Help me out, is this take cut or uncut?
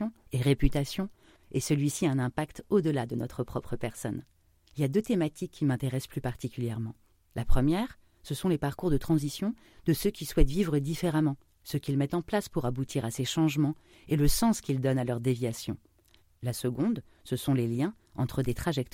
cut